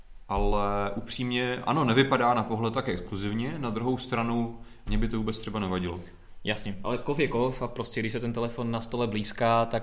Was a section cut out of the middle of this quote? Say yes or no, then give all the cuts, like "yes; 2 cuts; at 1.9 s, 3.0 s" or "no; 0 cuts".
no; 0 cuts